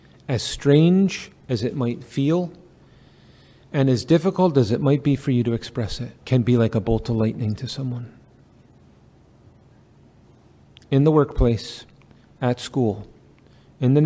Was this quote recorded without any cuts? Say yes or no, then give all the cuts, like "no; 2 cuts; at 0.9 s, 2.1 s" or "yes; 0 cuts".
no; 1 cut; at 6.2 s